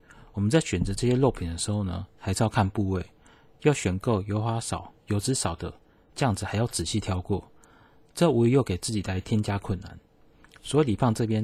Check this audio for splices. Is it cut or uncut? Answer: uncut